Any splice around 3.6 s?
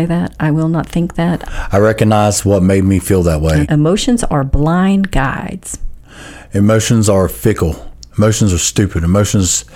yes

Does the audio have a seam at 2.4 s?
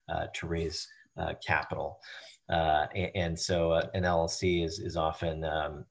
yes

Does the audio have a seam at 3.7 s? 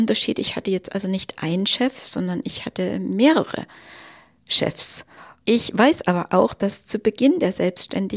no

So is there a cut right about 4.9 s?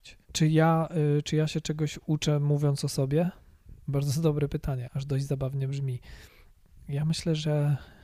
yes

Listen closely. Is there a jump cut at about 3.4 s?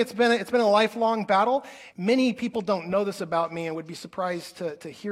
no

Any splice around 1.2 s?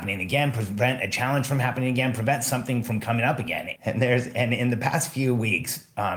no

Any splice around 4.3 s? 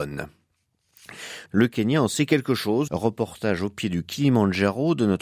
no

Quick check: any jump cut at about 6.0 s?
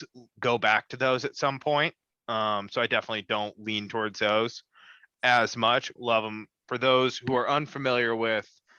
yes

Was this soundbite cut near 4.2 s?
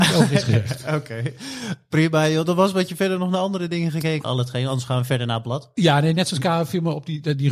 yes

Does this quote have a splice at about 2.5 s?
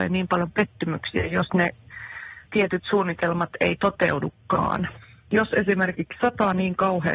yes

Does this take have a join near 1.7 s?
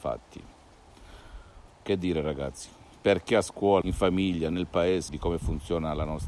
yes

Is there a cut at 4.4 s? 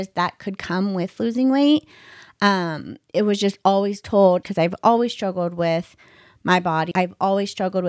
yes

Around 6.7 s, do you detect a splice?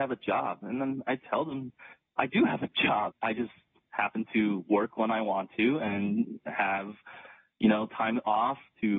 no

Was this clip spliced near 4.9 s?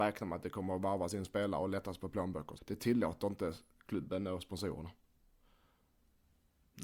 no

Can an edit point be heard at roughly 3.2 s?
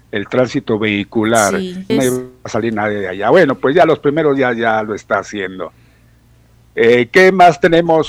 no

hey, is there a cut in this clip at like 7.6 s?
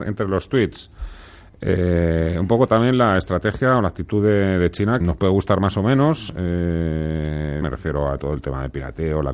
yes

